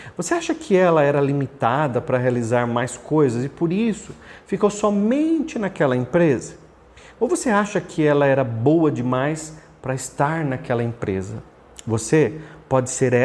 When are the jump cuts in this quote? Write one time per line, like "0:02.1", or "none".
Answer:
none